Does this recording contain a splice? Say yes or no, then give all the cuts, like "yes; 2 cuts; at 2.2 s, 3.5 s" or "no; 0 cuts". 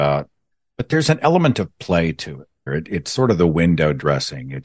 yes; 1 cut; at 2.7 s